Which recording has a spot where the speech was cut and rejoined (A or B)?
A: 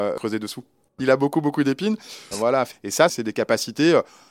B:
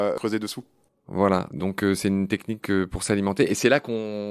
A